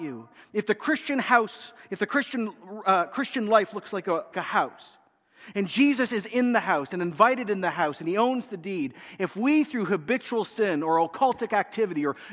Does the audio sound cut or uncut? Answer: cut